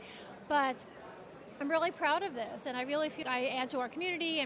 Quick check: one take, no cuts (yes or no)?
no